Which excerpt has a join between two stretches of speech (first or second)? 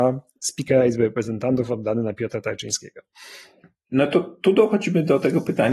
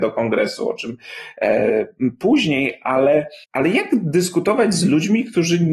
second